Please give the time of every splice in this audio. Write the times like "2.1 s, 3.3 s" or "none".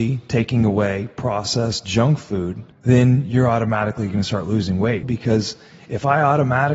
2.7 s, 5.0 s